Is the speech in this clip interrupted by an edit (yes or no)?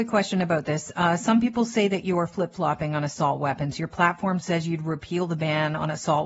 no